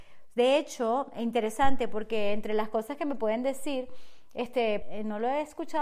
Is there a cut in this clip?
yes; 1 cut; at 4.8 s

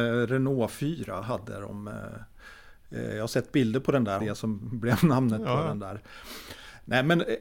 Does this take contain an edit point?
yes; 1 cut; at 4.2 s

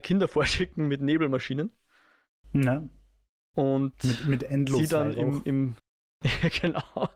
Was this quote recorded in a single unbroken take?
no; 1 cut; at 5.8 s

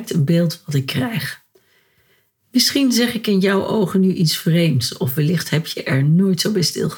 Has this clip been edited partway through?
no; 0 cuts

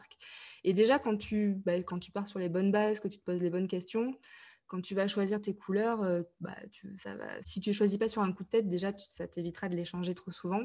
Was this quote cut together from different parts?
yes; 1 cut; at 7.4 s

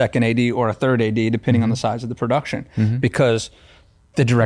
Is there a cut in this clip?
no; 0 cuts

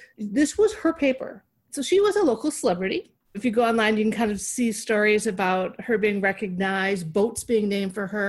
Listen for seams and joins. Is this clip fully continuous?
yes; 0 cuts

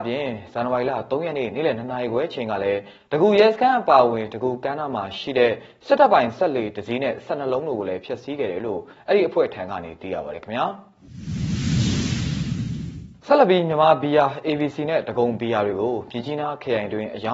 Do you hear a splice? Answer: no; 0 cuts

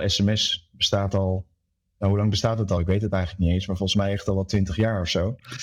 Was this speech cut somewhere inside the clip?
no; 0 cuts

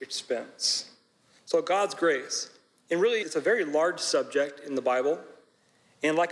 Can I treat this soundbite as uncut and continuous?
no; 1 cut; at 3.2 s

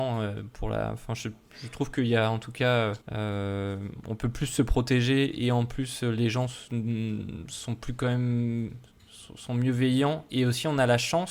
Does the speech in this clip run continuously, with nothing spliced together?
no; 1 cut; at 3.0 s

